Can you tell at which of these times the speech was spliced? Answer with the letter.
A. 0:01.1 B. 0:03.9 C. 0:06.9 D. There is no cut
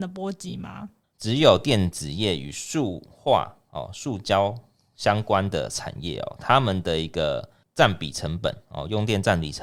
A